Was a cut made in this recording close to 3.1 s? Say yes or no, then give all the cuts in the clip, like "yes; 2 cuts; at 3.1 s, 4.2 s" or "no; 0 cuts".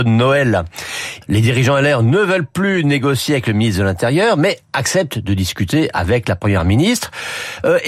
no; 1 cut; at 1.2 s